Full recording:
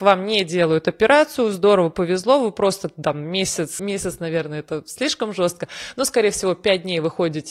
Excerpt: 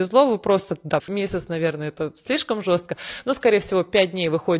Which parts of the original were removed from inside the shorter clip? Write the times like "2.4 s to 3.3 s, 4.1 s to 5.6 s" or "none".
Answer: 3.1 s to 3.7 s